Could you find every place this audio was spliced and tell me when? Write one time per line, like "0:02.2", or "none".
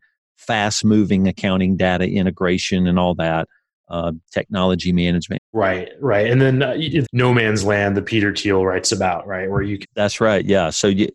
0:05.4
0:07.0
0:09.8